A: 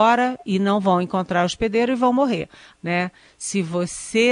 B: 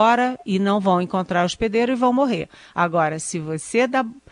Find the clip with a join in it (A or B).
A